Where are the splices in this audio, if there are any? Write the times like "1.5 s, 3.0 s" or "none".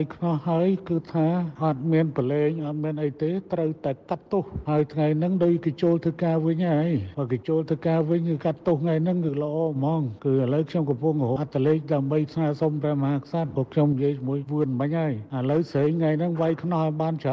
11.4 s